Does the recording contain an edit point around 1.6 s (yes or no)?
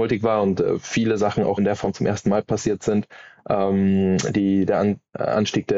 yes